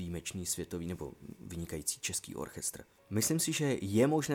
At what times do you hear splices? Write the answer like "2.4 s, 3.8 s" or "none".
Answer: 3.0 s